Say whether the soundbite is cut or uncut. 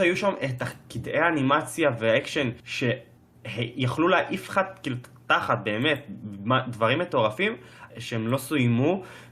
cut